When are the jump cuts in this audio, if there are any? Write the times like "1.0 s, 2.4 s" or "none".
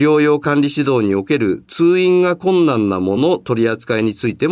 3.2 s